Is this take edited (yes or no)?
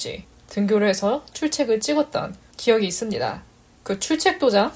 yes